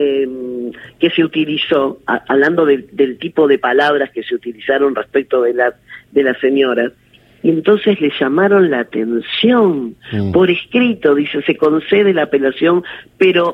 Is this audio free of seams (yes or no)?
yes